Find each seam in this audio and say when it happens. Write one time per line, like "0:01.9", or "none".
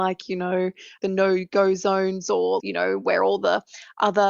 0:02.6